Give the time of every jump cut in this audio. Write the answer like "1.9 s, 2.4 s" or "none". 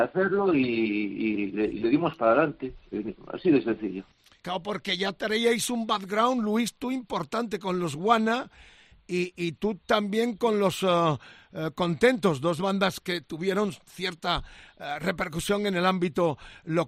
none